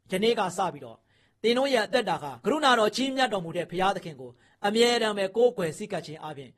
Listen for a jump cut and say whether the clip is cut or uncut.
cut